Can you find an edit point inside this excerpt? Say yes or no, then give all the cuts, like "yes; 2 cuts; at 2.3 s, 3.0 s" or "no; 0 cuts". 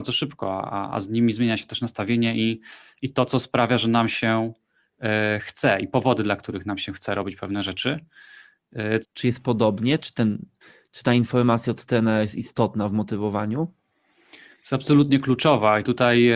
yes; 1 cut; at 9.0 s